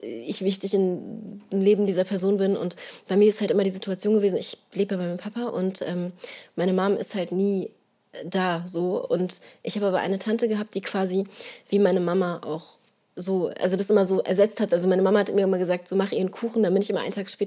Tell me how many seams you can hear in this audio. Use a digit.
0